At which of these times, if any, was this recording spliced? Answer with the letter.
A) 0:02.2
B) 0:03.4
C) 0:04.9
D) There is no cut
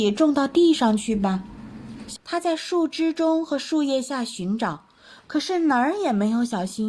A